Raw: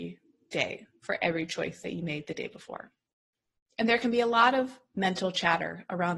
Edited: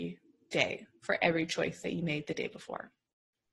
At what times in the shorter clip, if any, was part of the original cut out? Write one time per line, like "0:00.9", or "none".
none